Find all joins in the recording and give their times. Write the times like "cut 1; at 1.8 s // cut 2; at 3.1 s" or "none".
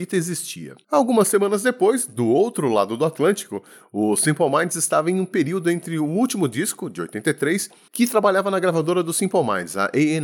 cut 1; at 7.9 s